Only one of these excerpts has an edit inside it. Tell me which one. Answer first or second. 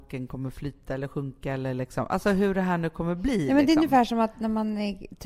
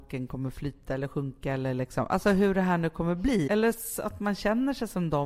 second